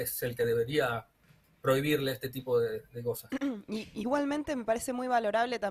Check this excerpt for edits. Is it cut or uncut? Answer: uncut